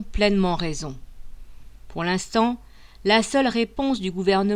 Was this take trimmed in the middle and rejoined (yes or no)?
no